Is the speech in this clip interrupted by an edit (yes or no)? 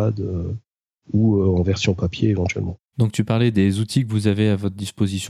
yes